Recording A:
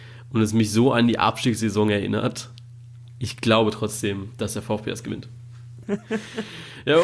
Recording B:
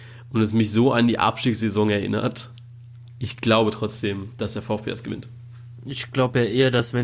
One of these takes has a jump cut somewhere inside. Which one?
A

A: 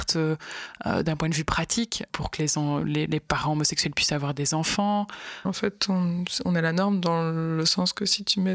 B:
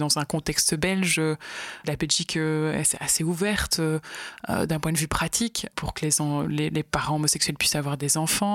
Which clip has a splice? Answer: A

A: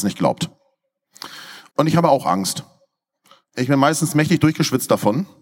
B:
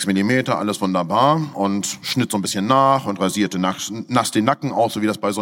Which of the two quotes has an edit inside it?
A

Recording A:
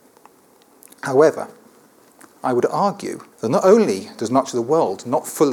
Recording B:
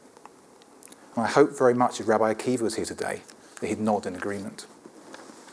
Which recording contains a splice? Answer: A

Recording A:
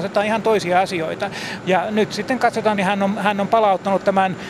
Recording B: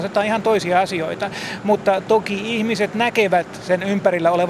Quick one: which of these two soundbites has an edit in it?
A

